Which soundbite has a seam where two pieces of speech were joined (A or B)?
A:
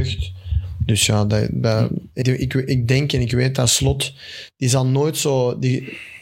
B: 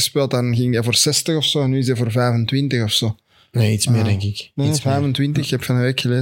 A